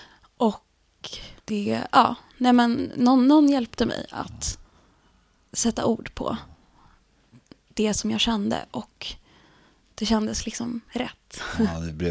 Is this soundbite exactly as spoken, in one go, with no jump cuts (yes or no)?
no